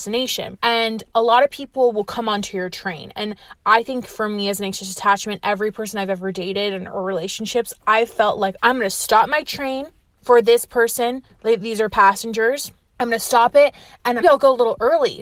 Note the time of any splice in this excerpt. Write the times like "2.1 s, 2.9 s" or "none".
8.6 s, 14.2 s